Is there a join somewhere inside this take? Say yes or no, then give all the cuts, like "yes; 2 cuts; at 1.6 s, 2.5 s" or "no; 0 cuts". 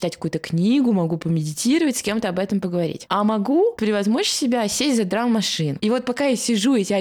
no; 0 cuts